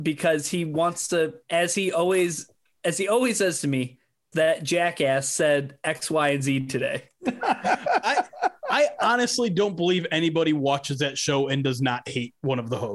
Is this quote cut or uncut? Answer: cut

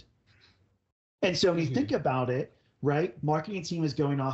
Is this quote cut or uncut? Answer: uncut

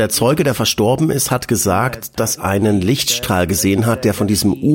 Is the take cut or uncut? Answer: cut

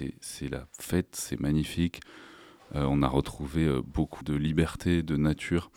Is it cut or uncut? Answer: cut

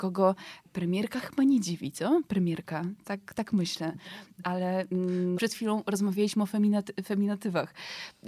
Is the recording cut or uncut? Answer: cut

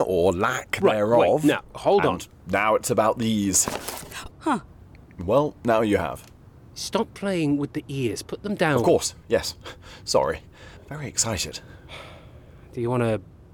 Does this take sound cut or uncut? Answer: cut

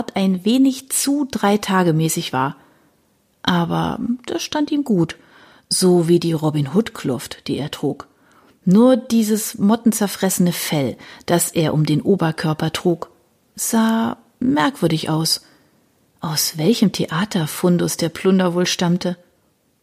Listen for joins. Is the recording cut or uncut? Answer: uncut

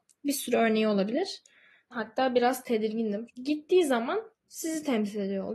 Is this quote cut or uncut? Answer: cut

